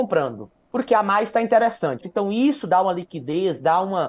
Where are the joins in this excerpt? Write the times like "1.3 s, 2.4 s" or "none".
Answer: 2.0 s

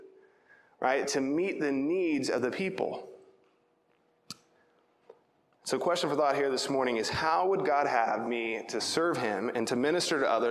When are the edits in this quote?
1.0 s

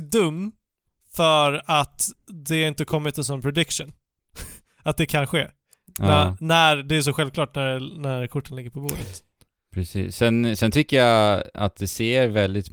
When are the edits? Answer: none

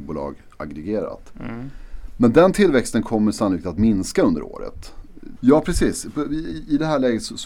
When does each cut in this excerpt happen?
5.4 s

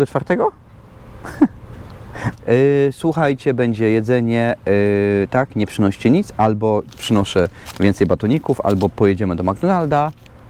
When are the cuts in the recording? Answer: 2.3 s

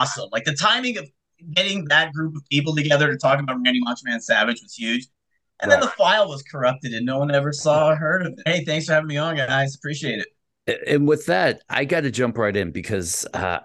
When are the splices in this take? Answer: 8.5 s

